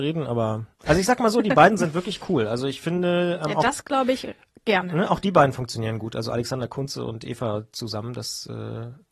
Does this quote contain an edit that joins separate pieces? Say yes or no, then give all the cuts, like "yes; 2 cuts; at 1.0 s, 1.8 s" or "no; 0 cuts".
no; 0 cuts